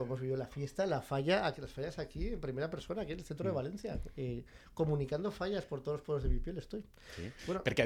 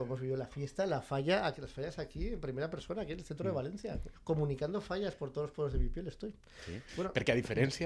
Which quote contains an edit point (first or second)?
second